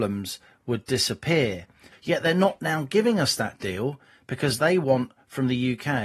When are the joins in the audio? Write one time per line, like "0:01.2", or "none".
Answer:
0:01.9